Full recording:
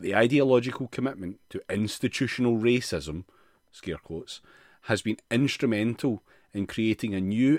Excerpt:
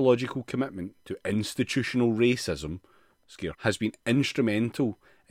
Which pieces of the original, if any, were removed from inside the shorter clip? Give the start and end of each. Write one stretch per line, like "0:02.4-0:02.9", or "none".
0:04.0-0:04.8